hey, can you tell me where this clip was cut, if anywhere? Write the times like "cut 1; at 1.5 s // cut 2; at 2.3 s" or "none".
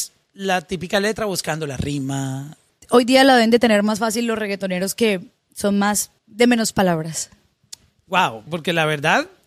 cut 1; at 2.7 s // cut 2; at 6.2 s // cut 3; at 8.5 s